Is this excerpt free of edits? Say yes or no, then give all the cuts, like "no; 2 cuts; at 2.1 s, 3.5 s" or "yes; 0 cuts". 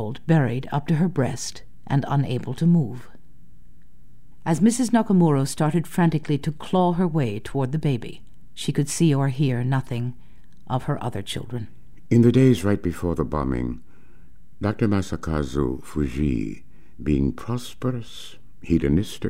yes; 0 cuts